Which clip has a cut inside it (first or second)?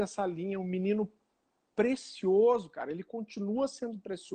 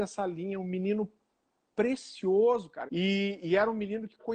second